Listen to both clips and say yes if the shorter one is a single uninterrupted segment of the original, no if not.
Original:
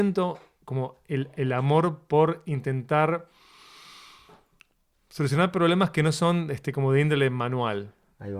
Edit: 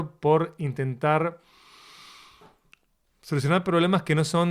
yes